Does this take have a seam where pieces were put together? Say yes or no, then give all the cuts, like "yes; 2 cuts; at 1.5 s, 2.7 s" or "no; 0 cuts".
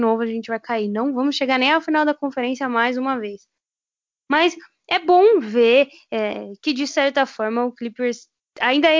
no; 0 cuts